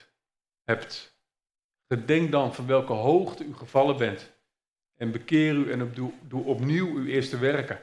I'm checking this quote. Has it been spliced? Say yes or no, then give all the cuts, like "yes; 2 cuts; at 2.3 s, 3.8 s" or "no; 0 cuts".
no; 0 cuts